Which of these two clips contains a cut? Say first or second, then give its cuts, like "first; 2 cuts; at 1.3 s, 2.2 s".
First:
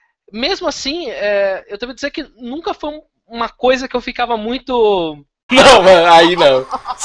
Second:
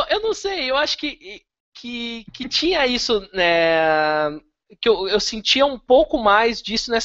first; 1 cut; at 5.5 s